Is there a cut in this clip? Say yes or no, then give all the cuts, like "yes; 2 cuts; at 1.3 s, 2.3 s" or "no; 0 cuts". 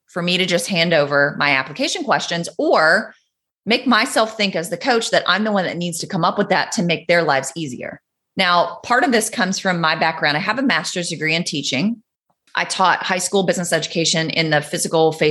yes; 1 cut; at 8.2 s